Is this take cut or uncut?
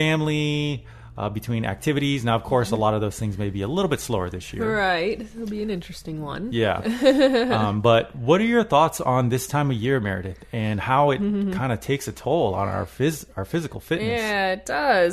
uncut